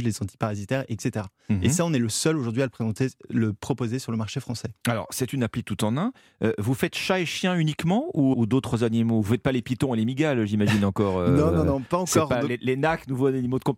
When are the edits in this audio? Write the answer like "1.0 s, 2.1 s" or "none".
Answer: 8.3 s